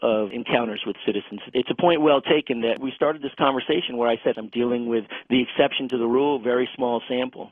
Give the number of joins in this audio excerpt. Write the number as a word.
one